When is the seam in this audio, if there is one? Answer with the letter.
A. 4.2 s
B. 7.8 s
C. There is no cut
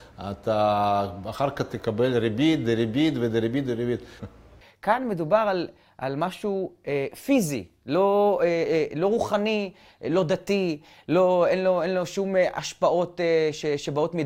A